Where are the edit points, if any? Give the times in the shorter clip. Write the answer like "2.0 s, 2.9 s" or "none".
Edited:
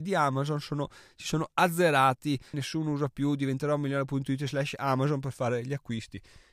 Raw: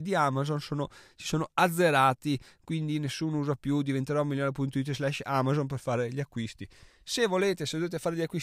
2.5 s